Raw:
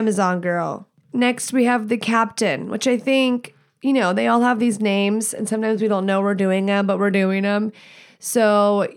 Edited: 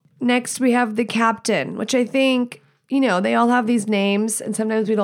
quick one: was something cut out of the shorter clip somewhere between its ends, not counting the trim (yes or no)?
no